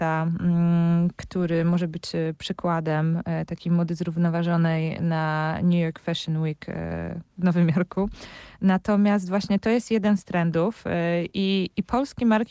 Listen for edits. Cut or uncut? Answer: uncut